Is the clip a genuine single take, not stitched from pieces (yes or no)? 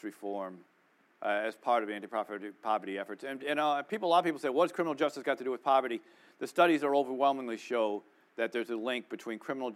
yes